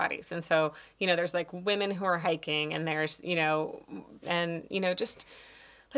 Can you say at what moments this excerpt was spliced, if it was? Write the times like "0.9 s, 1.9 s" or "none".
4.2 s